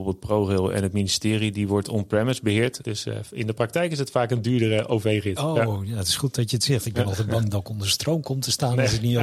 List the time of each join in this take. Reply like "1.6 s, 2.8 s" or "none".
2.8 s